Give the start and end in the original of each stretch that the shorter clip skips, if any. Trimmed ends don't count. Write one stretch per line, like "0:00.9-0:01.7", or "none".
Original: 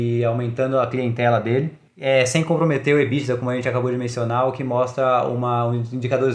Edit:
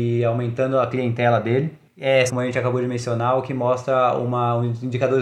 0:02.3-0:03.4